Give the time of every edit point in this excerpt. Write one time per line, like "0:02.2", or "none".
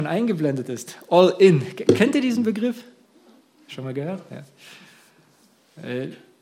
none